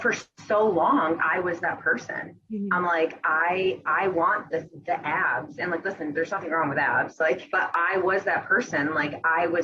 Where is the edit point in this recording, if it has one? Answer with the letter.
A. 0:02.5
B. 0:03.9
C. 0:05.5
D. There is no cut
D